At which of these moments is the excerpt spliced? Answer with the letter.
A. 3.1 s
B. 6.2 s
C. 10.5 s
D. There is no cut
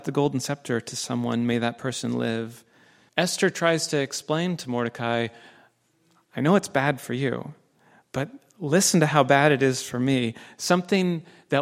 A